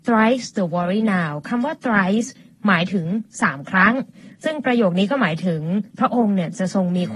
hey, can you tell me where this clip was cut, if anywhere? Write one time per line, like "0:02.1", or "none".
0:05.9